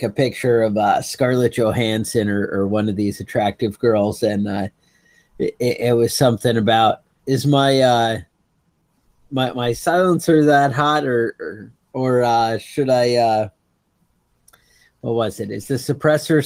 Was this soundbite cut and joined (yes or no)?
yes